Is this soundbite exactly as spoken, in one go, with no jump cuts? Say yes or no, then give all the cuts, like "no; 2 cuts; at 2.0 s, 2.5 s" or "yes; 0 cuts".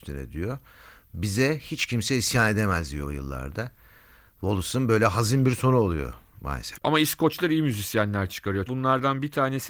no; 2 cuts; at 6.8 s, 8.7 s